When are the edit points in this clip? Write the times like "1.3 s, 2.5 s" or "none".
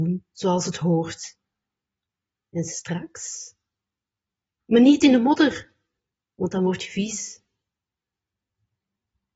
4.6 s